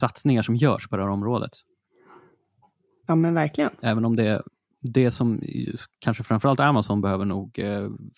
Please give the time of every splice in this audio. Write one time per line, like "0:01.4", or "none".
none